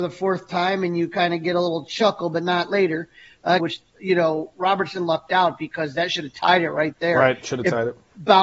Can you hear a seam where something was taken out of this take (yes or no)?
yes